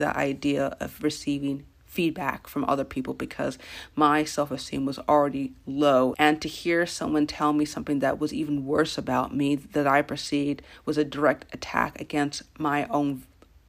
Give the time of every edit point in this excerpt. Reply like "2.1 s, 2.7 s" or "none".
6.1 s